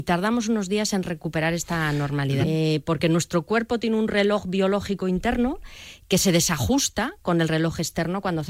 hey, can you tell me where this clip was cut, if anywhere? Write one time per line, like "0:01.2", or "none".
0:02.4